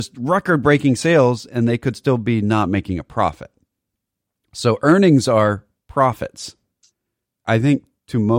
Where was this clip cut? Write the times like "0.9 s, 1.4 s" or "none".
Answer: 7.3 s

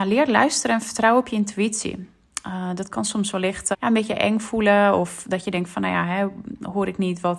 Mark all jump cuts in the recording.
3.7 s

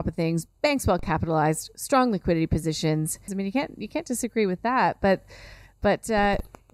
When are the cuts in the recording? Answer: 3.3 s

